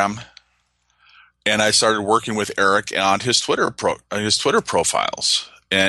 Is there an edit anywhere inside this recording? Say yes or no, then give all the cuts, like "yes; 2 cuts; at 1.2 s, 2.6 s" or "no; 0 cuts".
no; 0 cuts